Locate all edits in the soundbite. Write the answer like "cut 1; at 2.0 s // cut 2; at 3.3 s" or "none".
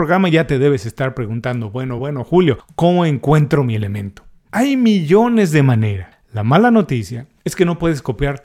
cut 1; at 2.0 s // cut 2; at 4.5 s